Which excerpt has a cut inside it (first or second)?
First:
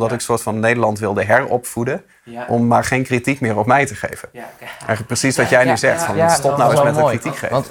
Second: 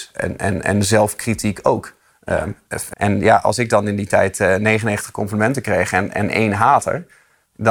second